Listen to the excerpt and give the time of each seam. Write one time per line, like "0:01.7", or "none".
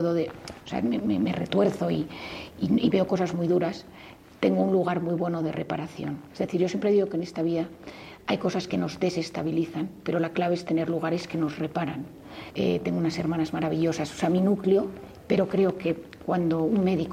0:12.5
0:15.2